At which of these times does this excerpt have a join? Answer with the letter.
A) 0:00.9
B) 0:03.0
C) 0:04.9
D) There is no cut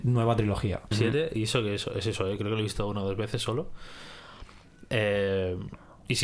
A